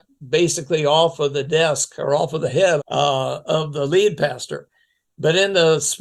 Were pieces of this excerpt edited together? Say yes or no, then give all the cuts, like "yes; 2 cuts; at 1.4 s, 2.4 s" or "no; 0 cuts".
yes; 1 cut; at 2.8 s